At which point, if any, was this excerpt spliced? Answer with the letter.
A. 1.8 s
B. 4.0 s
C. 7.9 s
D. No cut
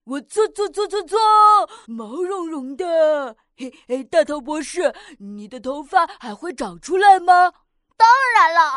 A